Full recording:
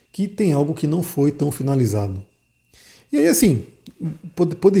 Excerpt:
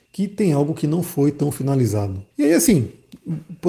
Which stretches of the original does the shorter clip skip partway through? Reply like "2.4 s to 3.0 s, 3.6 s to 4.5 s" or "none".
2.3 s to 3.0 s